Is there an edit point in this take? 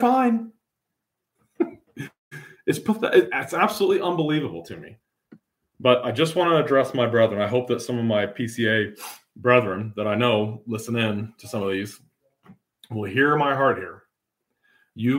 yes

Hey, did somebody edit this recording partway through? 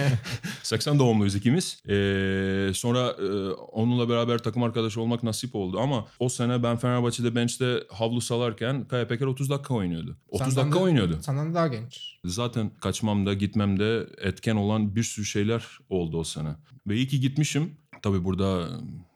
yes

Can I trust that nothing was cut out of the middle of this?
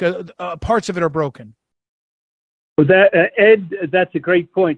yes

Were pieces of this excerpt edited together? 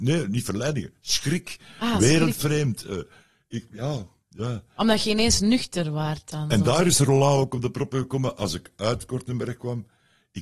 no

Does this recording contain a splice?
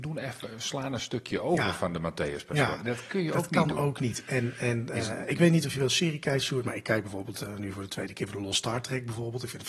no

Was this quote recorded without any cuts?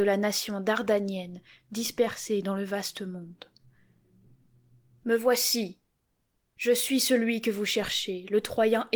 no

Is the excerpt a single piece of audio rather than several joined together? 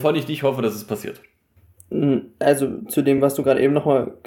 yes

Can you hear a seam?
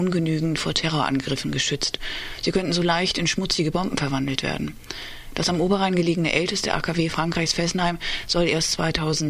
no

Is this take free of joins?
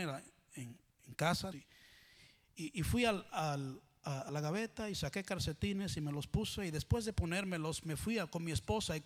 no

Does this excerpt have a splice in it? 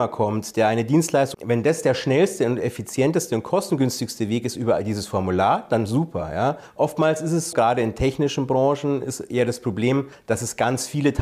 yes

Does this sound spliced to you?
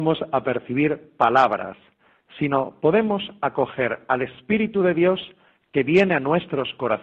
no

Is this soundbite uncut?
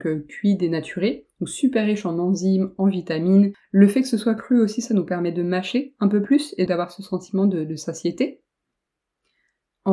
no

